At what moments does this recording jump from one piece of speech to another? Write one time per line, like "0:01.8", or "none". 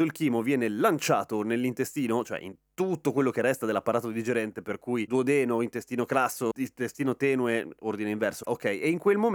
0:08.4